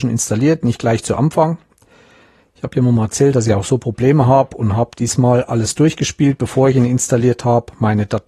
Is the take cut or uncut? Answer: uncut